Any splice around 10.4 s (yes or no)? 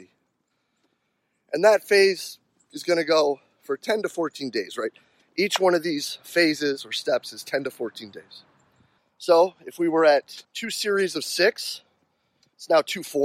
yes